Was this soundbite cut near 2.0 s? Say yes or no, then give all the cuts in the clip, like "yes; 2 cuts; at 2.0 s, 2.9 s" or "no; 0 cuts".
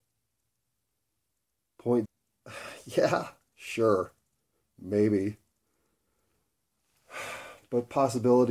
yes; 1 cut; at 2.0 s